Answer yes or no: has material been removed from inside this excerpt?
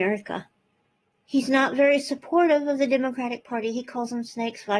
yes